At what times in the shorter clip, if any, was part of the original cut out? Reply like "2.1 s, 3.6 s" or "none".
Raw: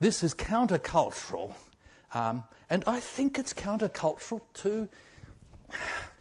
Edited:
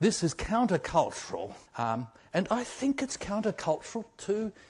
1.7 s